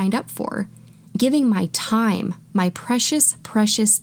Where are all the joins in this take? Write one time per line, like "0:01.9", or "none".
none